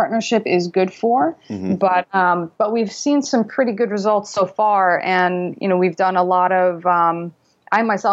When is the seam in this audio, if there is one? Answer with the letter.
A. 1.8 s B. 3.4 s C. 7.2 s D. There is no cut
D